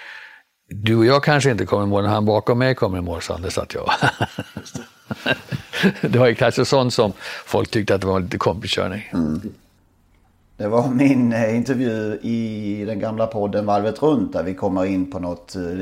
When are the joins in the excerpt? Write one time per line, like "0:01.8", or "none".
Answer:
none